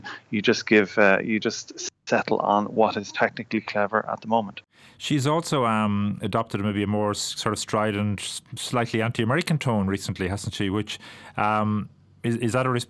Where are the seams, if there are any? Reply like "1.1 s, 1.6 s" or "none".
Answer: none